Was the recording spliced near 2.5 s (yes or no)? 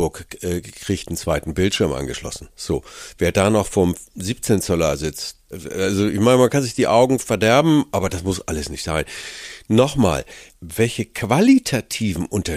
no